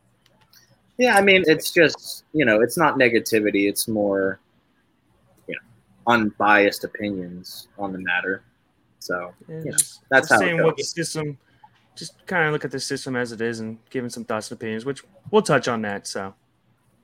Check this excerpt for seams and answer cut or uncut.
cut